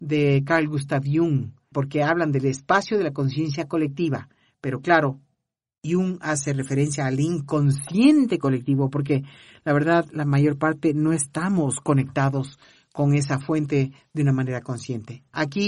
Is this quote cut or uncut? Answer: cut